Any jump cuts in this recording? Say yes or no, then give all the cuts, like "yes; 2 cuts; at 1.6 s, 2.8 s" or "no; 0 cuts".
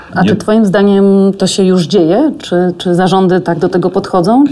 no; 0 cuts